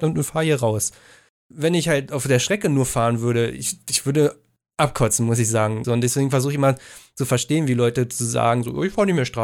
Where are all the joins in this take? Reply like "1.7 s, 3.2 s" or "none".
5.8 s